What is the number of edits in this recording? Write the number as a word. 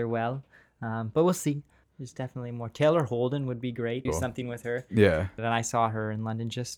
three